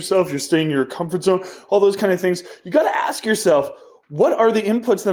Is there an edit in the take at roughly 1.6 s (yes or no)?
no